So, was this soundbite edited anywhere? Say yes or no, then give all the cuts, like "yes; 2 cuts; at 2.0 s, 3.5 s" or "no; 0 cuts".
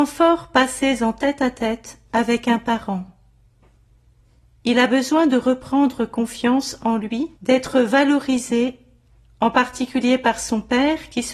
yes; 1 cut; at 7.4 s